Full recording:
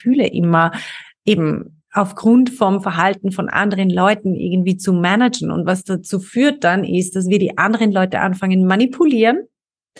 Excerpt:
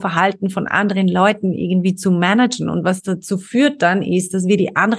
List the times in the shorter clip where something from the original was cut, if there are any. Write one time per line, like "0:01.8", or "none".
none